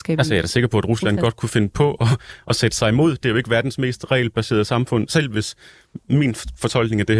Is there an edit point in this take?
yes; 1 cut; at 5.1 s

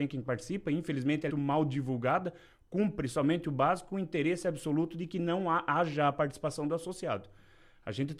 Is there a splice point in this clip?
yes; 1 cut; at 1.3 s

